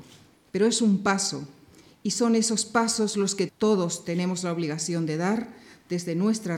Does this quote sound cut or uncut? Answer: cut